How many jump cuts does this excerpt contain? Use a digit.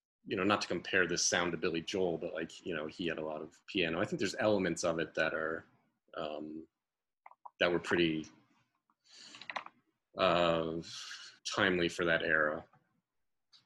2